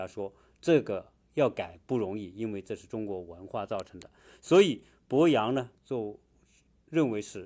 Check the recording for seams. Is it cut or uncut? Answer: cut